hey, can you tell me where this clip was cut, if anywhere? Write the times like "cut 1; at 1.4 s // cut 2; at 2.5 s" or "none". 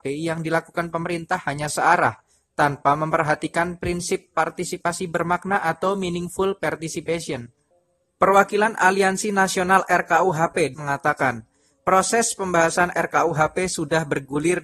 cut 1; at 10.7 s